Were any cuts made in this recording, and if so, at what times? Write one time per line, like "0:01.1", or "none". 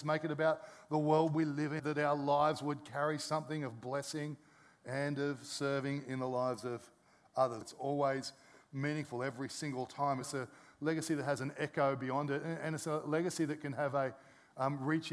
0:01.8
0:07.6
0:10.2